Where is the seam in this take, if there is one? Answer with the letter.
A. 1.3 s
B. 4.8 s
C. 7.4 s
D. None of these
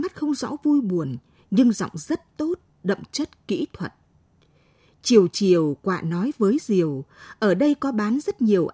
D